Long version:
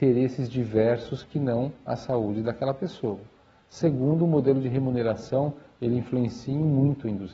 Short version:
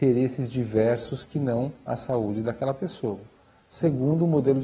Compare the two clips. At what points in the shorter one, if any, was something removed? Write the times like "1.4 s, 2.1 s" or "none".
none